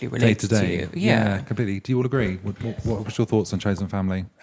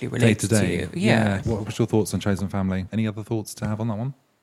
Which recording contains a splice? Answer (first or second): second